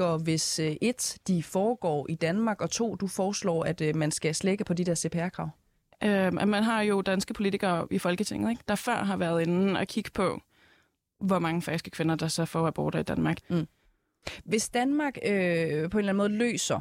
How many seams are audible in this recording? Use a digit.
1